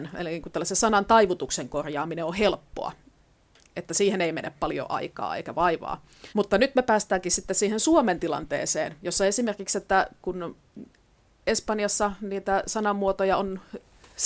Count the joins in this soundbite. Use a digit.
1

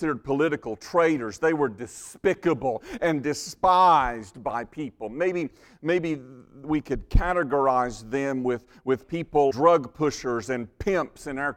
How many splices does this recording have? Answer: 1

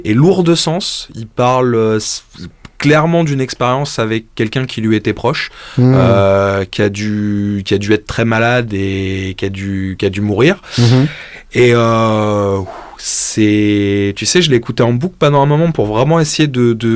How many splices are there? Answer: 0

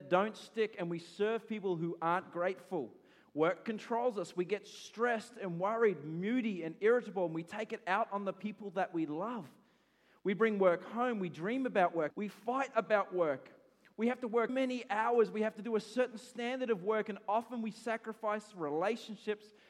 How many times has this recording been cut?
2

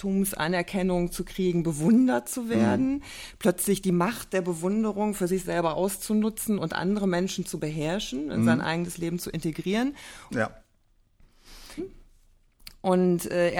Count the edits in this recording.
2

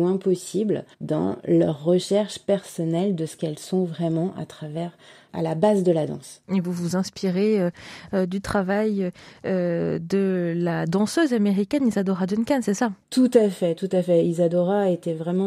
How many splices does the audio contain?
1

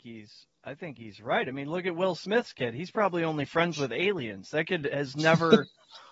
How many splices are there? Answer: 0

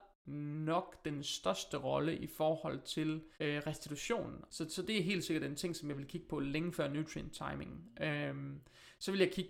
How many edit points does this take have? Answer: 2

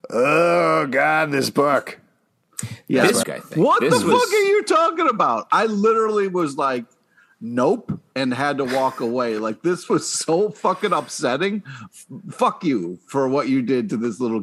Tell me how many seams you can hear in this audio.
1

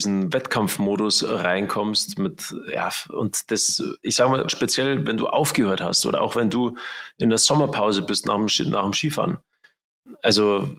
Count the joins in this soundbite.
1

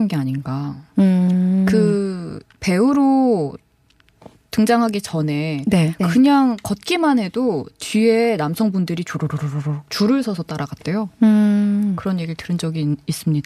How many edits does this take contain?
1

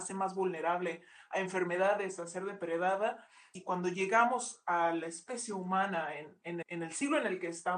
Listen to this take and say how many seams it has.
2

